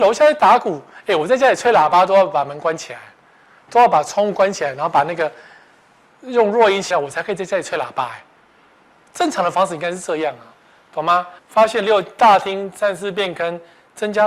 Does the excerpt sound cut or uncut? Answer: cut